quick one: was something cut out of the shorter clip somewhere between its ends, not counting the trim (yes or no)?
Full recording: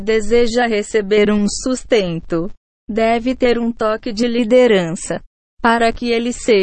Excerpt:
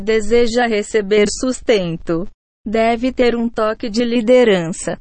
yes